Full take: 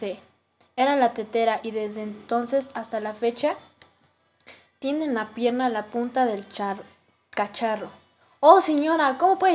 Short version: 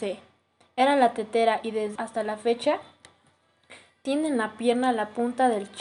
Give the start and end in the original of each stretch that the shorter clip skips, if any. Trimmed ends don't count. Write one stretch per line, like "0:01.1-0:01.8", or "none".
0:02.0-0:02.7